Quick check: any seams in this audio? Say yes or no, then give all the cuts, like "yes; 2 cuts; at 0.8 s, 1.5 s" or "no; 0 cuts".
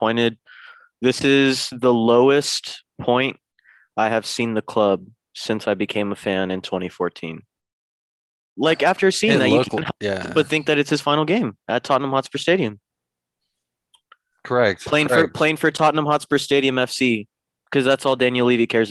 yes; 1 cut; at 8.6 s